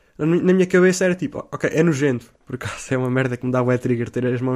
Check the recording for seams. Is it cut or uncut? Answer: cut